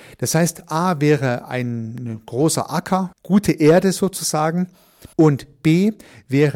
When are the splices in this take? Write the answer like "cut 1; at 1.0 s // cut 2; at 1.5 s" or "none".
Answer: cut 1; at 3.1 s // cut 2; at 5.1 s